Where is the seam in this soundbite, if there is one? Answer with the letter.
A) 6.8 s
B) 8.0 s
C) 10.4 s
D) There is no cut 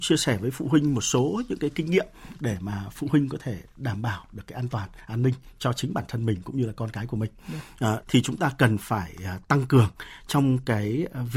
B